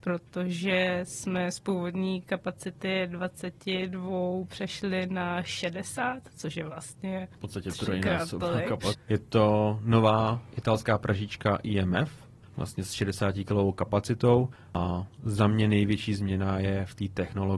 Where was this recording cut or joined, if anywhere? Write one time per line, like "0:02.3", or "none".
0:08.9